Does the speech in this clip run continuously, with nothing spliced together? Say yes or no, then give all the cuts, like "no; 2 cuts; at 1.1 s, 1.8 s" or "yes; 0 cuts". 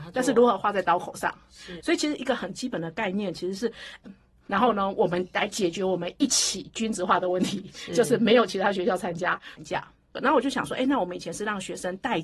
no; 3 cuts; at 1.8 s, 4.0 s, 9.6 s